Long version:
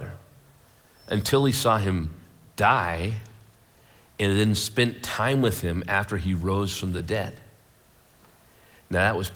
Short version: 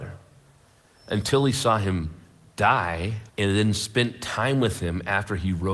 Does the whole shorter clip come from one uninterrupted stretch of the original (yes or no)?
no